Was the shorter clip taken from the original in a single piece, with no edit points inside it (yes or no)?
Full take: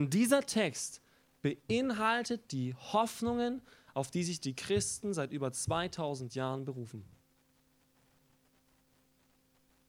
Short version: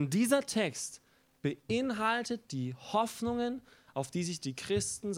yes